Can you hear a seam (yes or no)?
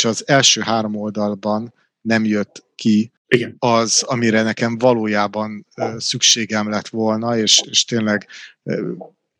yes